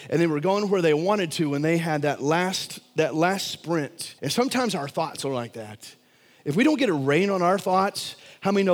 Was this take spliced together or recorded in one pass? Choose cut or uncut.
cut